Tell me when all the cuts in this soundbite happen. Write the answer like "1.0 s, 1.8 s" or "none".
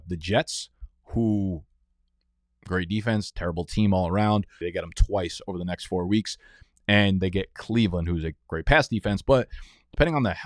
4.6 s